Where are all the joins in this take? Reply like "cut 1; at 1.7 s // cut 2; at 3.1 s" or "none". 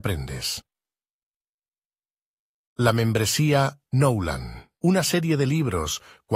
cut 1; at 4.8 s